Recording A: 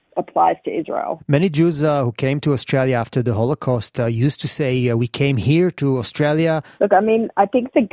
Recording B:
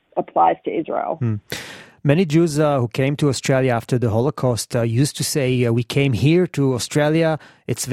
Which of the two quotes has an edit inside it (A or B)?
A